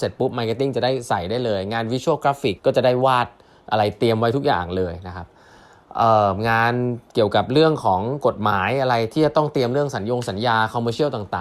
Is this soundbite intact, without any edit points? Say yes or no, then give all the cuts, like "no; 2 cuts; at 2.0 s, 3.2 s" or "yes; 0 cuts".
no; 1 cut; at 2.6 s